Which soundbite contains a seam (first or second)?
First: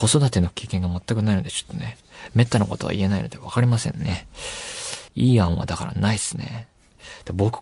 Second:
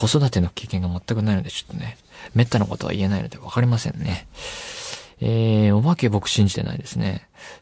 first